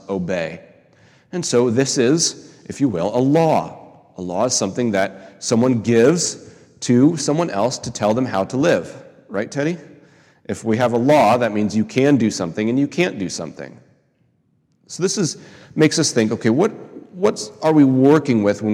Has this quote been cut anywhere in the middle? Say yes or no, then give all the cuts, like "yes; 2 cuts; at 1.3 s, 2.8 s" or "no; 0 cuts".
no; 0 cuts